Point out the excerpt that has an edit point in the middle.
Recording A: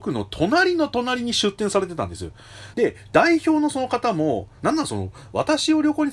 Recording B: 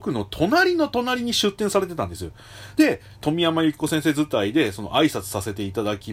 A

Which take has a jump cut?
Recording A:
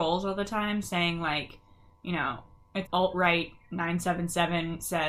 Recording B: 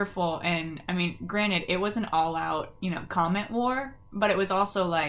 A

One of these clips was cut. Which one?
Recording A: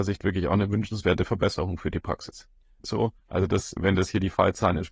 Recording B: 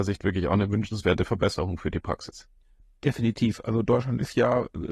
A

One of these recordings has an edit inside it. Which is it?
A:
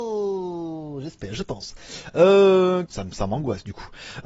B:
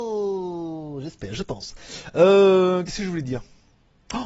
A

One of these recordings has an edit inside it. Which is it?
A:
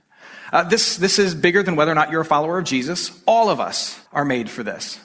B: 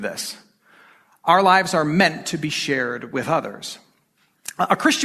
A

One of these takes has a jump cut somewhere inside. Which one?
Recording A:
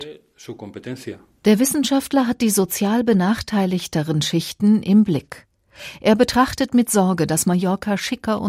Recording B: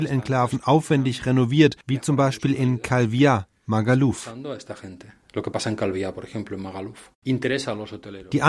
B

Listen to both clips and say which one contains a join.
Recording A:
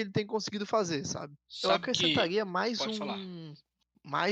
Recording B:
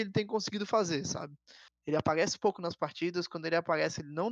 A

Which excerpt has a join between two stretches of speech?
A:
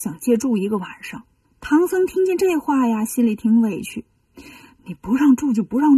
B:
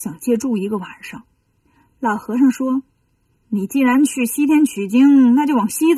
A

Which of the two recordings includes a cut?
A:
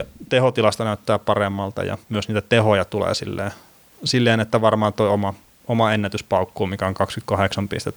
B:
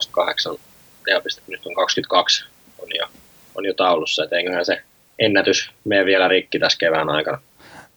A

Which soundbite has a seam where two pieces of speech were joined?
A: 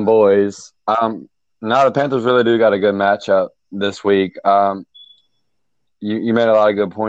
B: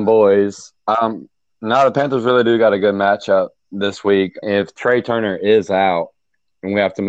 B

